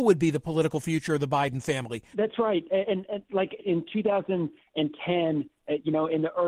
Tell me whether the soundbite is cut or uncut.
cut